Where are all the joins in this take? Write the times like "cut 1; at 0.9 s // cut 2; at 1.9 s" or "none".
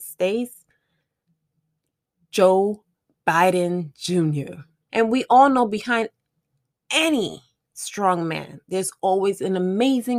cut 1; at 4.9 s